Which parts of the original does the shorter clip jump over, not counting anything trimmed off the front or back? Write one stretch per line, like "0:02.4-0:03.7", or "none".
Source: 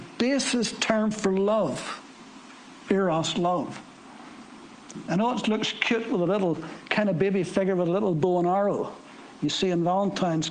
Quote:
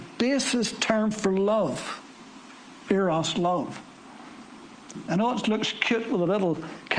none